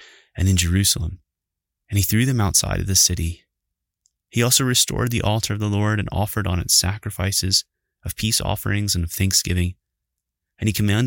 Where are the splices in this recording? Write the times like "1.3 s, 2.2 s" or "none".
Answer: none